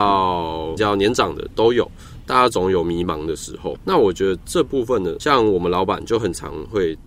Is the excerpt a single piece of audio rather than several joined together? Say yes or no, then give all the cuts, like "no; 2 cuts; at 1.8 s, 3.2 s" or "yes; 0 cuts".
no; 1 cut; at 3.8 s